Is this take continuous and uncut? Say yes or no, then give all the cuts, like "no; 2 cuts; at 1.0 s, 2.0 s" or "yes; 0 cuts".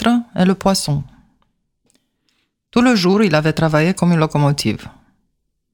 yes; 0 cuts